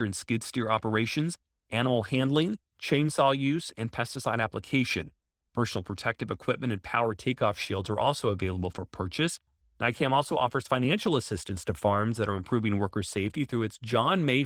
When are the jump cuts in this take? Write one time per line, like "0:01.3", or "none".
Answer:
none